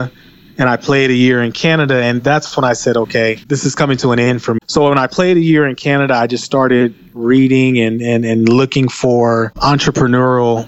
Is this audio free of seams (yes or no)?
no